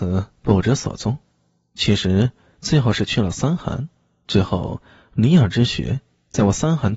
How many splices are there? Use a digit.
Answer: 0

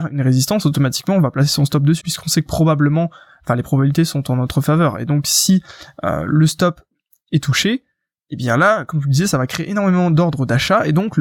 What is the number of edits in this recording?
1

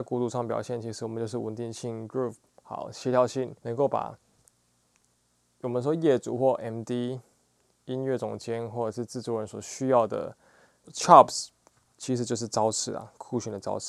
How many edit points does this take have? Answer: 2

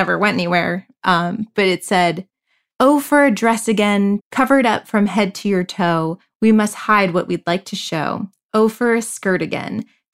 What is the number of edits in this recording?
1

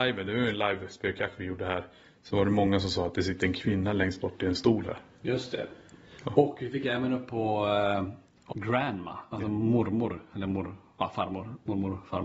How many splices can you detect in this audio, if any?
1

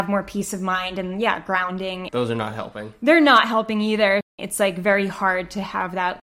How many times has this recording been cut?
2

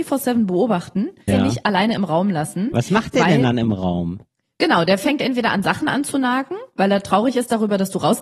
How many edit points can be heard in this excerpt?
1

